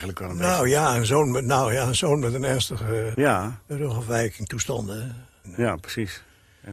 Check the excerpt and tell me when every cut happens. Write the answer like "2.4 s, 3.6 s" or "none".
3.1 s, 5.4 s